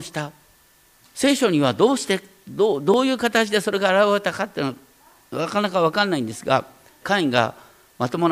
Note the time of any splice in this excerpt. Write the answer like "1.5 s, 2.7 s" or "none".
1.0 s, 7.0 s